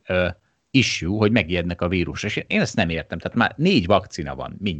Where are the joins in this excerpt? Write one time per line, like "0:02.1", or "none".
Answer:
none